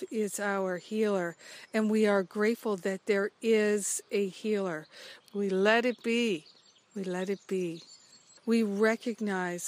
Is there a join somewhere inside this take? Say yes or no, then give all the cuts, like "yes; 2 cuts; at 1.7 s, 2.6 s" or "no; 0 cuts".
yes; 2 cuts; at 5.2 s, 8.4 s